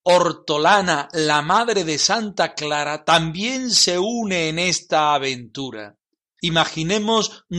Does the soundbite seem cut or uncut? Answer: uncut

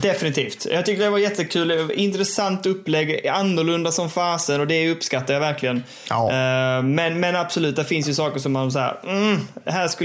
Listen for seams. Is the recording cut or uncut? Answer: uncut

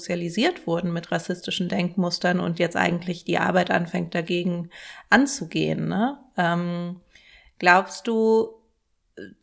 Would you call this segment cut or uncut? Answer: uncut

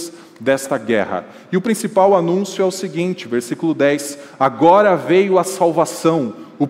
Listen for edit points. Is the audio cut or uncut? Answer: uncut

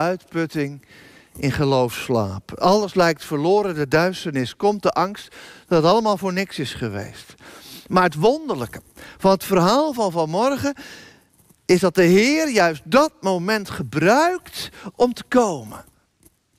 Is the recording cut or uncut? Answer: uncut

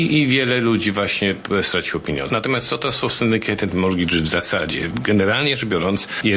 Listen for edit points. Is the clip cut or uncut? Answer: uncut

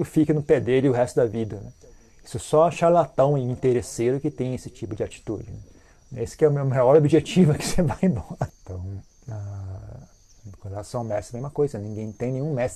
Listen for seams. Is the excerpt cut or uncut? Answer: cut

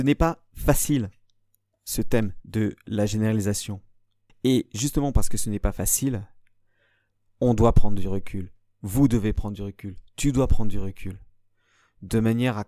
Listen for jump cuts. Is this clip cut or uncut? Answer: cut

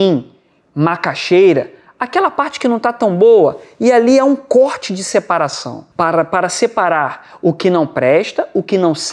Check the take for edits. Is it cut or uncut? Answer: cut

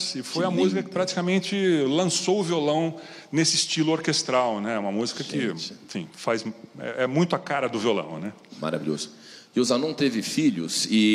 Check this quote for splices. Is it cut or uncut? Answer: uncut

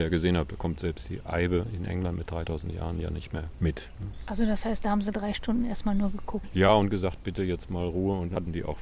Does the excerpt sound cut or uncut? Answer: uncut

